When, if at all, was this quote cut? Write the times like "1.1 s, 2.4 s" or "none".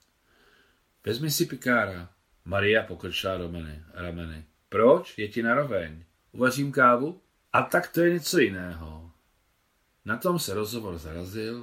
2.3 s, 6.2 s, 7.4 s